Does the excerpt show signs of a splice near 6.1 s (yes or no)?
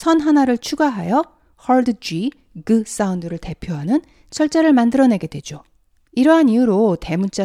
yes